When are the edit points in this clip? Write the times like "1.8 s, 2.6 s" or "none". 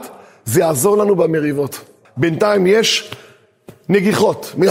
2.0 s